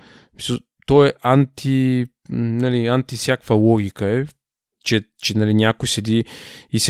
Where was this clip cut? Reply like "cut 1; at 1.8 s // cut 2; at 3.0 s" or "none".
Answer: cut 1; at 4.7 s